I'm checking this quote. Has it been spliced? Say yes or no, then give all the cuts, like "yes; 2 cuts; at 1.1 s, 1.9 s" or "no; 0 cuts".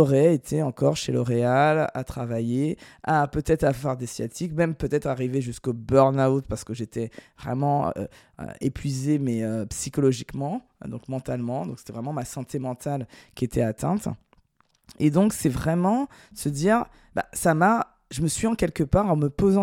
no; 0 cuts